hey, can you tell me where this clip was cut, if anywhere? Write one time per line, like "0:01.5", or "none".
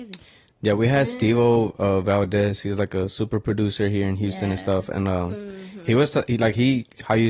none